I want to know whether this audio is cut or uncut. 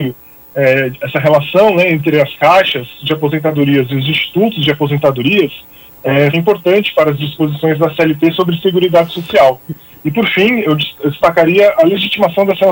cut